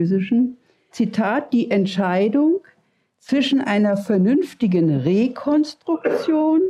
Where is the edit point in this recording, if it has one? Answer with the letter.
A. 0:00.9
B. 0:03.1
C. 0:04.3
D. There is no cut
A